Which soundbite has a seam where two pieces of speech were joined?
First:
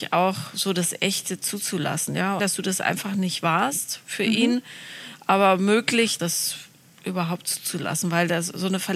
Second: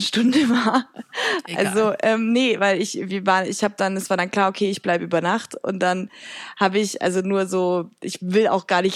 first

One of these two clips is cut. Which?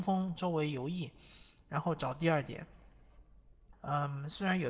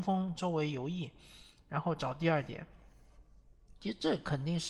first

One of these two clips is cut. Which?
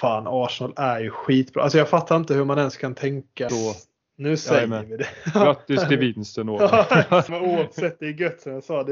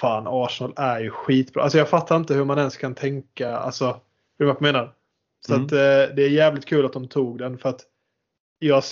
first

